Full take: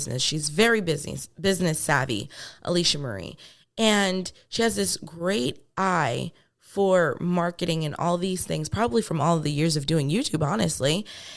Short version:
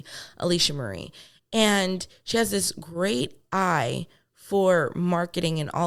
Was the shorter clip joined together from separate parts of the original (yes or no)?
no